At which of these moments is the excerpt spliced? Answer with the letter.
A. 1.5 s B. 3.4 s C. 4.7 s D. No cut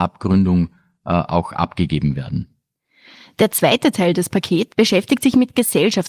C